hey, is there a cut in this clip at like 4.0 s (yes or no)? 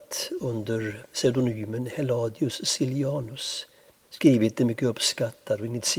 yes